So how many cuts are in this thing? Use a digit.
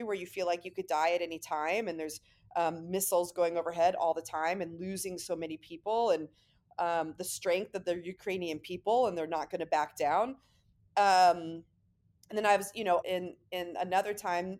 1